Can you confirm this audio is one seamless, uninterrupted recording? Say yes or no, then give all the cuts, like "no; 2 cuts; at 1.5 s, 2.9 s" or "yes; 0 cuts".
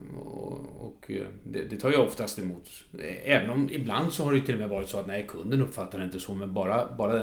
yes; 0 cuts